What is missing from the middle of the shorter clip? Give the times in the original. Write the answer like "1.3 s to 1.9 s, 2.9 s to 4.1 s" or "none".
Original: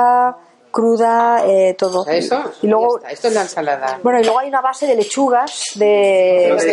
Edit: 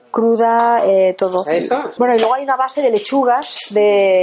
2.6 s to 4.0 s